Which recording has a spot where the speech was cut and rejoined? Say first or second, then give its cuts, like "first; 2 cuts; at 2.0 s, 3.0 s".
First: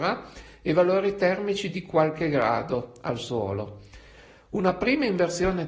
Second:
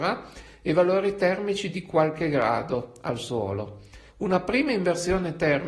second; 1 cut; at 4.1 s